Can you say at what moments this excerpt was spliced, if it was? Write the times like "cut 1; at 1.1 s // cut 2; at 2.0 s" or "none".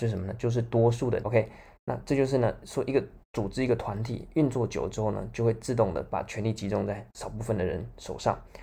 cut 1; at 1.2 s